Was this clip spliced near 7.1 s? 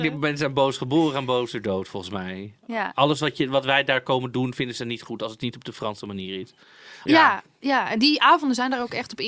yes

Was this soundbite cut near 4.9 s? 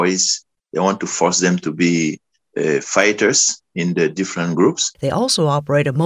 yes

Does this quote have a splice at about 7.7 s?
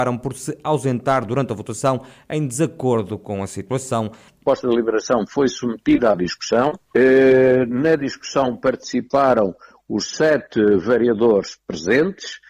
no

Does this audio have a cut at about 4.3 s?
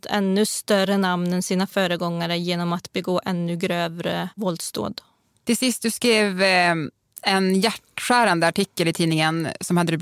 yes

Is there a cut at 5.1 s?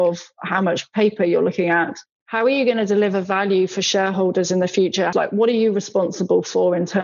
yes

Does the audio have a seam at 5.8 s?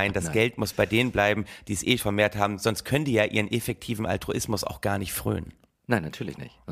no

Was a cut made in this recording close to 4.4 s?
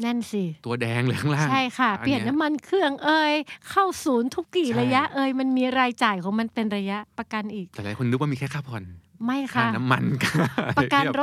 yes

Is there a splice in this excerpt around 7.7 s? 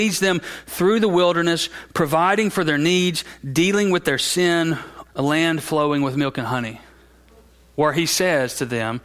no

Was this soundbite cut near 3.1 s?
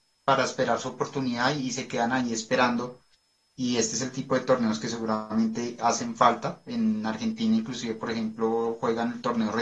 no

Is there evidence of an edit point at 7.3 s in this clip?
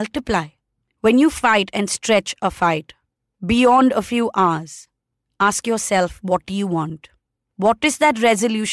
no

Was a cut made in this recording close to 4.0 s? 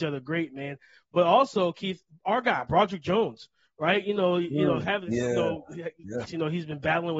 no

